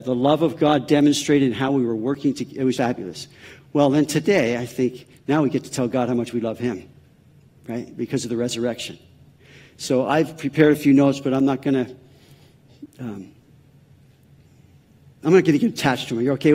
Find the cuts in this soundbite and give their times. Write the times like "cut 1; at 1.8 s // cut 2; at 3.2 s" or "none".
cut 1; at 2.7 s